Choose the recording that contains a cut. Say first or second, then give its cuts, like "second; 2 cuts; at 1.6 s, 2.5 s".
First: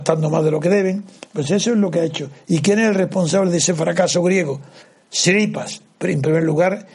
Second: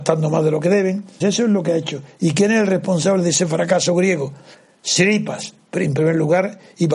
second; 1 cut; at 1.2 s